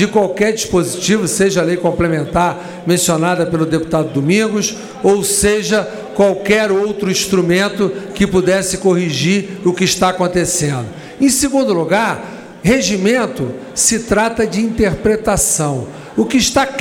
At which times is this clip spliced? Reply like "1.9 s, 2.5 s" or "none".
none